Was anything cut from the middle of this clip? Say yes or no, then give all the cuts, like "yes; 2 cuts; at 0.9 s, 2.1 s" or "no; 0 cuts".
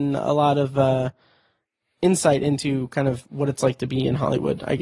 no; 0 cuts